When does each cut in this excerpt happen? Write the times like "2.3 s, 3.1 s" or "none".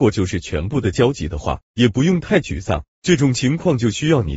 1.6 s

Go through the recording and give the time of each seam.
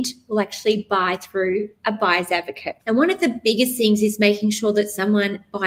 2.8 s

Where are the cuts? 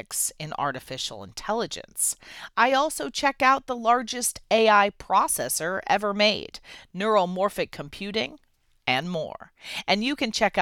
none

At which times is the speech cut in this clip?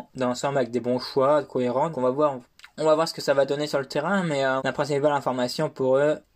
1.9 s, 4.6 s

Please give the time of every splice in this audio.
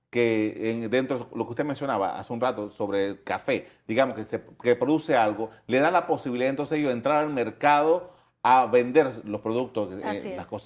none

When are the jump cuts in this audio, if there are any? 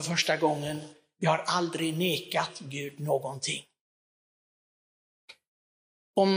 none

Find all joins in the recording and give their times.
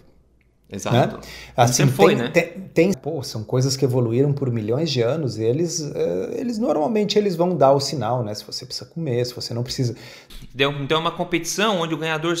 2.9 s, 10.3 s

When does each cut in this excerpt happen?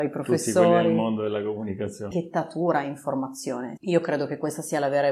2.1 s, 3.8 s

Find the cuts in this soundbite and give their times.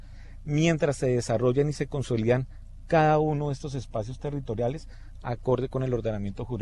none

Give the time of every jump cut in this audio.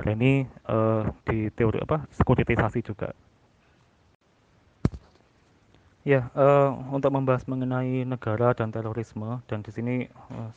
none

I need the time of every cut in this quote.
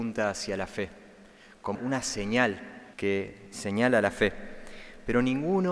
1.7 s, 2.9 s

